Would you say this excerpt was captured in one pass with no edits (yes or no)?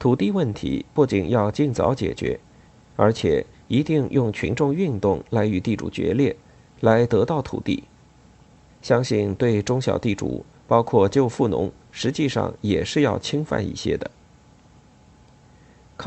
no